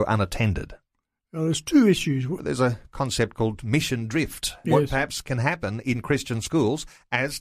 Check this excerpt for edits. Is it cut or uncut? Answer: cut